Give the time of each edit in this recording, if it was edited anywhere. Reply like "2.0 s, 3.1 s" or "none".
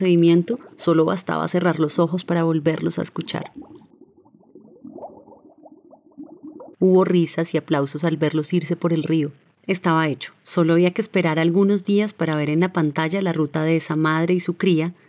6.7 s